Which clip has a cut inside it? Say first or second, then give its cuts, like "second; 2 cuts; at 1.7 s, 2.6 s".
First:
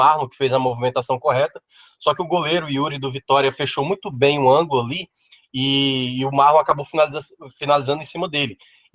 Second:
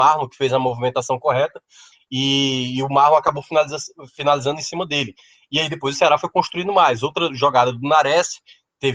second; 1 cut; at 1.9 s